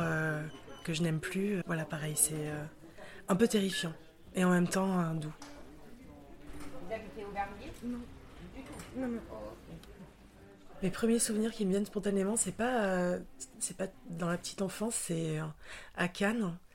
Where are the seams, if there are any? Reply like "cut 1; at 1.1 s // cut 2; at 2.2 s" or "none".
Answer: cut 1; at 1.6 s